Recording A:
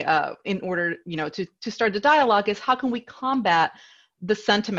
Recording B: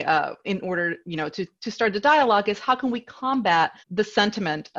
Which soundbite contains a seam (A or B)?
B